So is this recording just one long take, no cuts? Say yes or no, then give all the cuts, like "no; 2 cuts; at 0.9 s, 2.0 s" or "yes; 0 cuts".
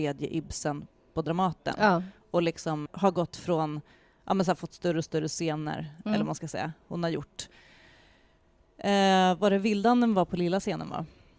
no; 1 cut; at 2.9 s